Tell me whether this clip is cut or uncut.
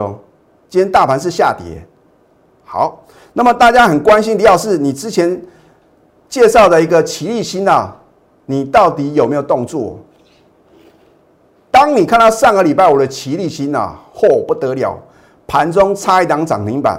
uncut